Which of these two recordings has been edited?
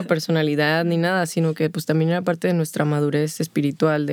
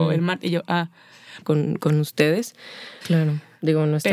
second; 2 cuts; at 1.4 s, 3.0 s

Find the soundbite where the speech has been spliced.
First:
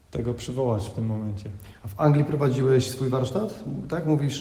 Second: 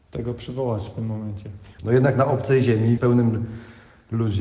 second; 2 cuts; at 1.8 s, 3.0 s

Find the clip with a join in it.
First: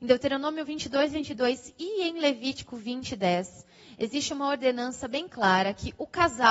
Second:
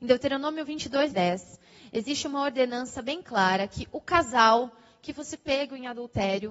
second; 1 cut; at 1.1 s

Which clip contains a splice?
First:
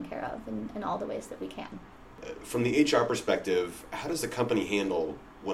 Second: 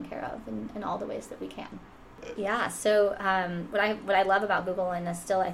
second; 1 cut; at 2.4 s

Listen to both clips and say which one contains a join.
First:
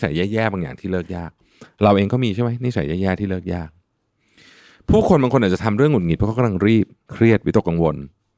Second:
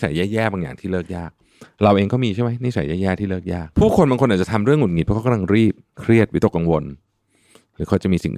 second; 1 cut; at 3.7 s

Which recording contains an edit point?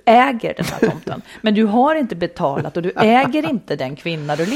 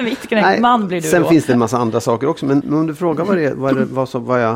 second; 1 cut; at 2.6 s

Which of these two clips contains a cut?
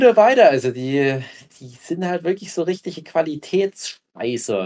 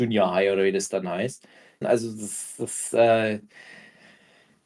second; 1 cut; at 1.8 s

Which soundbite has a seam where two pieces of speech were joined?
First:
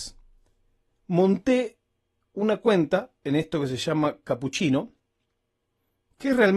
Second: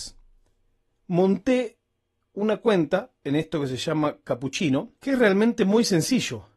second; 1 cut; at 5.0 s

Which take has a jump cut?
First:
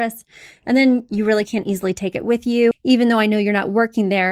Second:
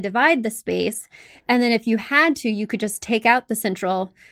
first; 1 cut; at 2.7 s

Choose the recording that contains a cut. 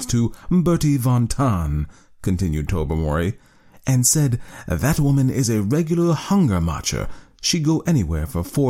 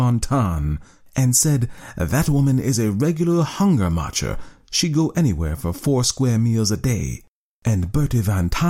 second; 1 cut; at 1.1 s

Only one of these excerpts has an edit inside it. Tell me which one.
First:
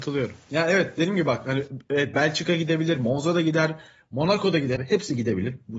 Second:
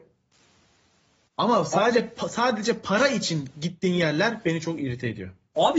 first; 1 cut; at 4.8 s

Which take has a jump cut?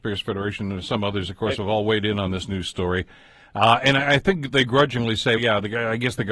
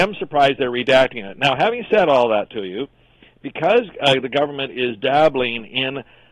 first; 1 cut; at 5.4 s

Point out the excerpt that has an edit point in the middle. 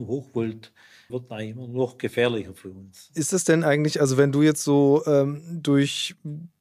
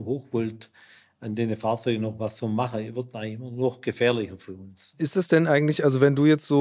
first; 1 cut; at 1.1 s

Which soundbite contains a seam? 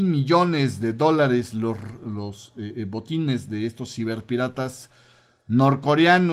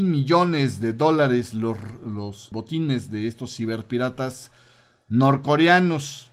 second; 1 cut; at 2.5 s

